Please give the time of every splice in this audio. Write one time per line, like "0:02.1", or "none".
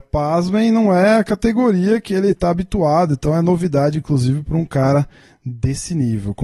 none